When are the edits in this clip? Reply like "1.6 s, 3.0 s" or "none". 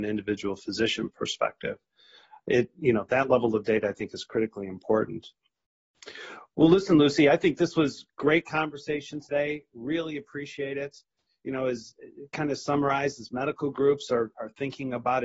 none